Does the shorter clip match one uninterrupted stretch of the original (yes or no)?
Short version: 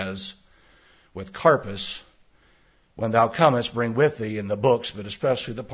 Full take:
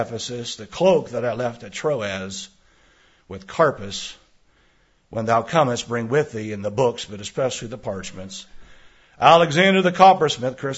yes